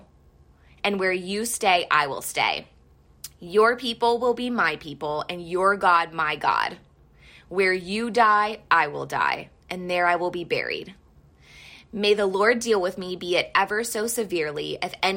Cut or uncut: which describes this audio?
uncut